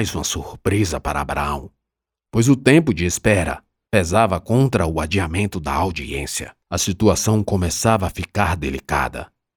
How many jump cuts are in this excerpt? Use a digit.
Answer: 2